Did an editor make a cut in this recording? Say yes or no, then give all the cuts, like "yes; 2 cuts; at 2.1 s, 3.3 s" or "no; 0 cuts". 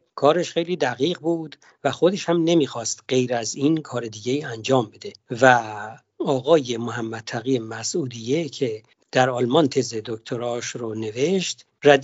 no; 0 cuts